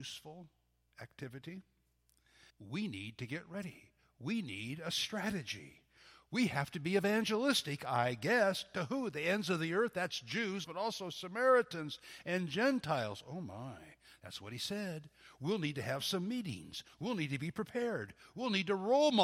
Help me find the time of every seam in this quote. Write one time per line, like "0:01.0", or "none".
0:02.5
0:10.6

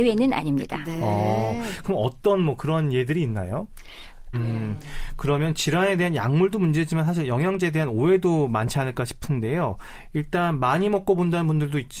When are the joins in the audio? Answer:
0:04.3

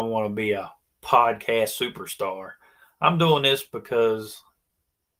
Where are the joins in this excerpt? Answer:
none

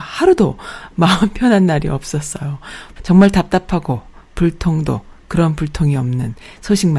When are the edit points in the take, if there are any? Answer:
0:03.0

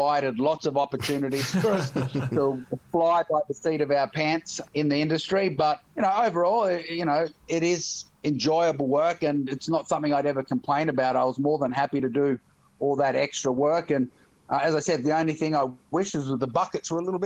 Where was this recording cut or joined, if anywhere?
none

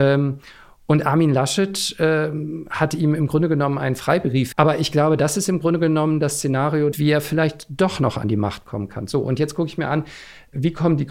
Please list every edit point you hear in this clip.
0:04.5
0:06.9

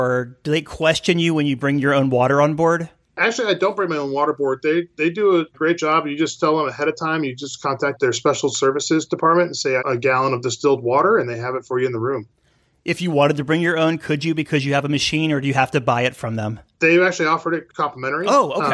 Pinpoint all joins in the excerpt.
0:05.5
0:09.8

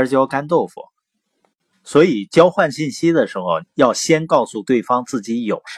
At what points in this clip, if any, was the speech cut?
0:01.7
0:03.6

